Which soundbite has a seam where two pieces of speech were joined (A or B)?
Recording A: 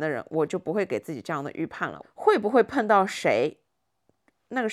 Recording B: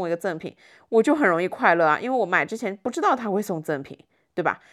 A